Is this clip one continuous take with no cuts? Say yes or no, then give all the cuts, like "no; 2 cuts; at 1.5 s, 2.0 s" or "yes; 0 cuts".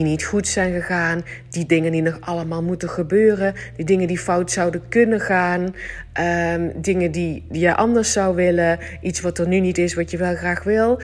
yes; 0 cuts